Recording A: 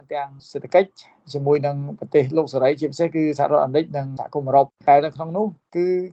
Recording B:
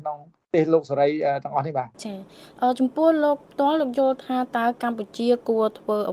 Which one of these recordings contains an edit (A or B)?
B